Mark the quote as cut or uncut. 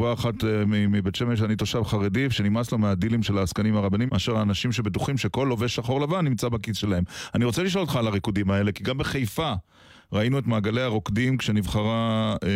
cut